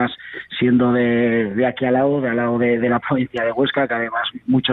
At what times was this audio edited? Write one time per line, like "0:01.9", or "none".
none